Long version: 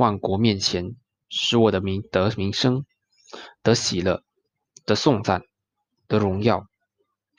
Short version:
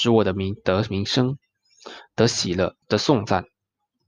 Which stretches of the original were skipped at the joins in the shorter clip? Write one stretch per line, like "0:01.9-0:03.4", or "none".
0:04.3-0:04.8